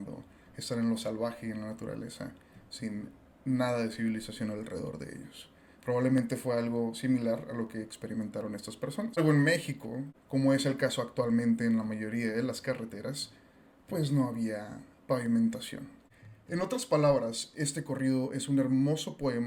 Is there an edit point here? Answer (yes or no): no